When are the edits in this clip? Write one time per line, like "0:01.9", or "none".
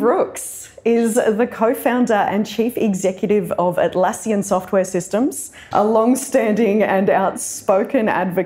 0:05.7